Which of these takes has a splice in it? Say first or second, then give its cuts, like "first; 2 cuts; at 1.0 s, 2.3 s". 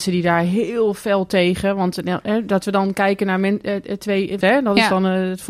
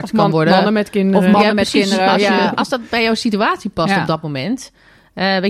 first; 1 cut; at 4.4 s